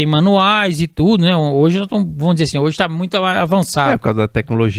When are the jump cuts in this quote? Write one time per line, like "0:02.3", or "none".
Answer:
none